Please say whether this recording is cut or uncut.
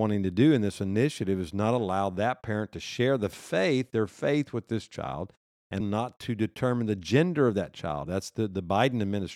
cut